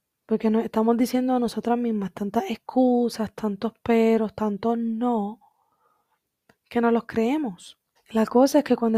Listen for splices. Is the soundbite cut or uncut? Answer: cut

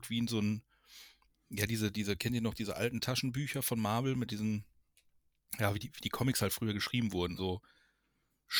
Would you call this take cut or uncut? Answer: cut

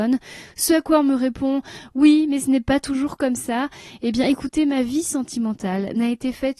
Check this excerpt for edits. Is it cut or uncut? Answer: uncut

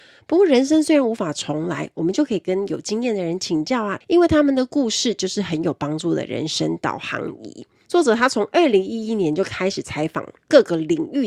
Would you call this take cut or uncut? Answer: cut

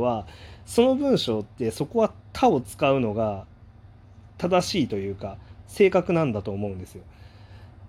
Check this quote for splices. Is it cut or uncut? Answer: uncut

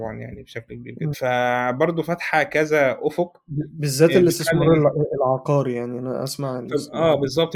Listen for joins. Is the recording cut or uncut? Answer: cut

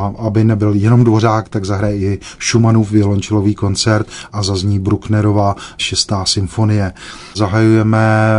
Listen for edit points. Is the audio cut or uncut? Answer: cut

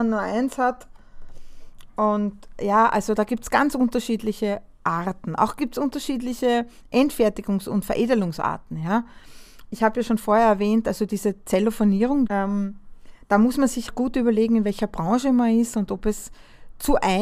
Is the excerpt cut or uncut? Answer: cut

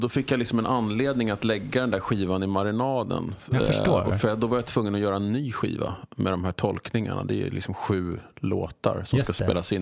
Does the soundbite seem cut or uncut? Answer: uncut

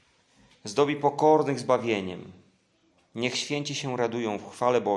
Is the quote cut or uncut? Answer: uncut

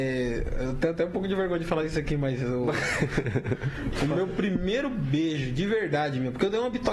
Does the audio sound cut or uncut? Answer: uncut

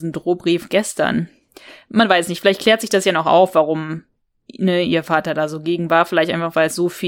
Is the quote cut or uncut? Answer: uncut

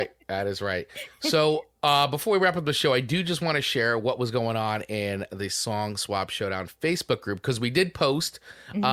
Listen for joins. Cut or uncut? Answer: cut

